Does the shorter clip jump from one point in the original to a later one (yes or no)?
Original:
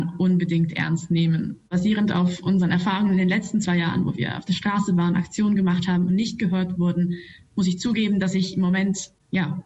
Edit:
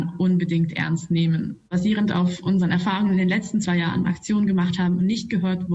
yes